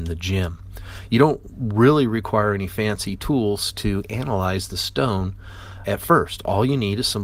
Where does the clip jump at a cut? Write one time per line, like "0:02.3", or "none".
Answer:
0:01.1
0:05.8